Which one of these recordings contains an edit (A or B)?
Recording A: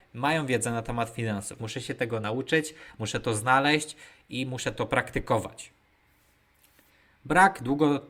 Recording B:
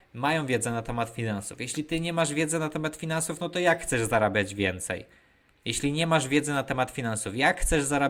A